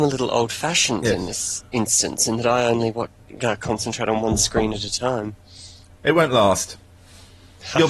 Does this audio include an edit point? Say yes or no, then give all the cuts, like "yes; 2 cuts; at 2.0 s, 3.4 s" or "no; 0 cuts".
no; 0 cuts